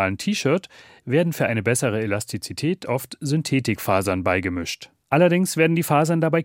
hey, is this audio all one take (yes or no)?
no